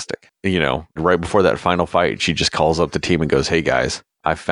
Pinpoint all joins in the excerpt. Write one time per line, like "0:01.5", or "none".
0:01.0

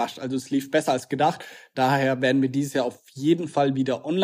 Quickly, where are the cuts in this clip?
none

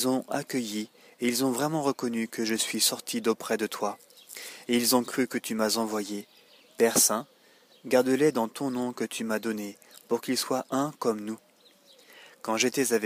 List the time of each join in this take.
0:06.6

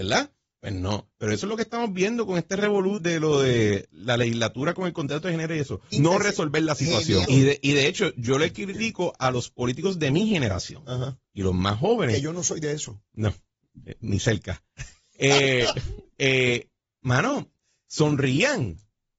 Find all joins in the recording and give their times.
0:03.0
0:05.9
0:07.2

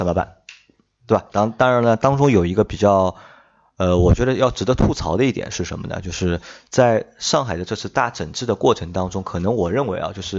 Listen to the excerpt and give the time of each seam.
0:01.3

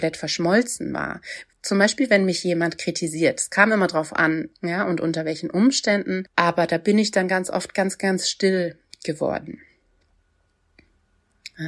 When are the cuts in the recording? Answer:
0:04.5

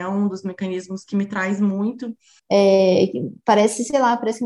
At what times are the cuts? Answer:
0:02.4

